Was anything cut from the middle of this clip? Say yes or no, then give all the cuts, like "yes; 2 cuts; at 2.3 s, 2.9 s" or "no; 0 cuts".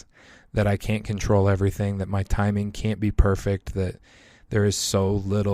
no; 0 cuts